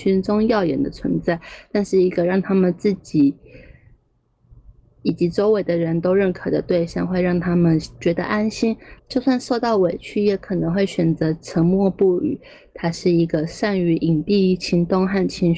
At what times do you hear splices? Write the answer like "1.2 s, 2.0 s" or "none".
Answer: 9.0 s